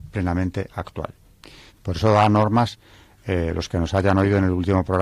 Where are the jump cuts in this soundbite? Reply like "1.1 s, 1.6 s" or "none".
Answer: 1.7 s